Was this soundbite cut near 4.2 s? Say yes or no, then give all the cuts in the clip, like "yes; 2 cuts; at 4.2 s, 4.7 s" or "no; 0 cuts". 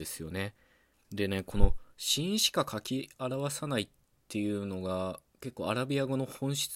no; 1 cut; at 1.0 s